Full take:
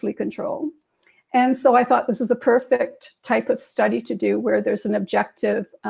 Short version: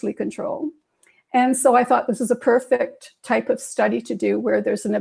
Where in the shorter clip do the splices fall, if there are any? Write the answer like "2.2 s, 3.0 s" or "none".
none